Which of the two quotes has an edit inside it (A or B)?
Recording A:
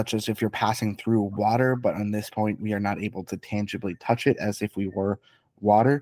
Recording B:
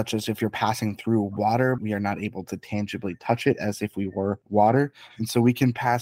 B